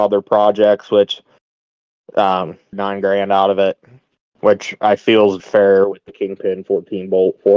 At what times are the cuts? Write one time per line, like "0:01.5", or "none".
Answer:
0:02.7
0:05.4